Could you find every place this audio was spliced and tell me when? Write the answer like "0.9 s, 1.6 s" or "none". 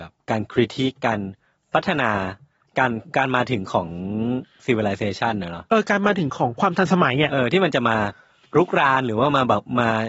none